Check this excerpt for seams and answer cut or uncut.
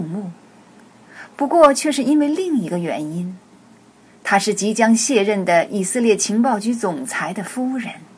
uncut